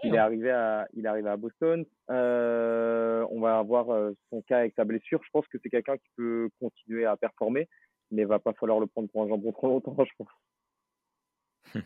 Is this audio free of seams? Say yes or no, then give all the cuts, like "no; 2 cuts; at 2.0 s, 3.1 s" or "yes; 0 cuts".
no; 1 cut; at 1.9 s